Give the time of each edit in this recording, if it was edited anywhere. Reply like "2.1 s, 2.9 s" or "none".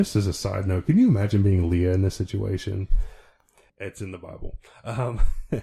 3.7 s